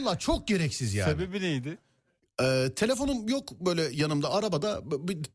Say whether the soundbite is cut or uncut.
uncut